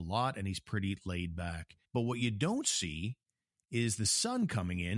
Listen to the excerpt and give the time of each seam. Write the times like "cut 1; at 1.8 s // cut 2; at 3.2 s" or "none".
cut 1; at 1.8 s